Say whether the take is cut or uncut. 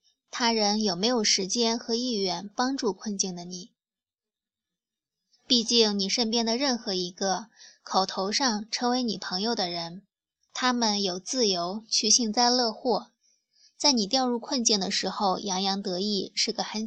uncut